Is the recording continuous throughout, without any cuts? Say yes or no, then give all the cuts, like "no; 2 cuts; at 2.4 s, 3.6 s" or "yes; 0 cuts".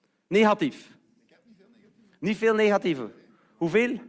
yes; 0 cuts